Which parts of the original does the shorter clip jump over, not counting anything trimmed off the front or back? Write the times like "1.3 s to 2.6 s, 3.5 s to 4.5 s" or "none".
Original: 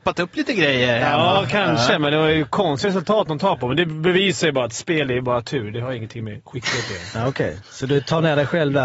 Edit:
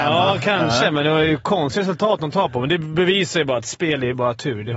none